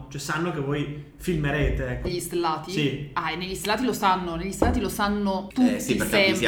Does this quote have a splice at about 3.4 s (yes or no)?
no